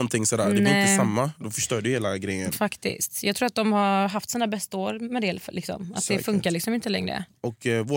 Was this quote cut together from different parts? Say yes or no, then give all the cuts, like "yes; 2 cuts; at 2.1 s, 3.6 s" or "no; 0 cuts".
no; 0 cuts